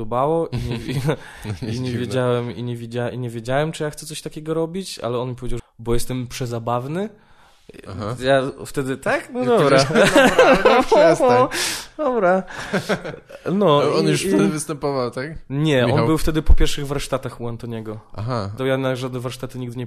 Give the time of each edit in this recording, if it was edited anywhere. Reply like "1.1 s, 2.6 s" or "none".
5.6 s, 18.6 s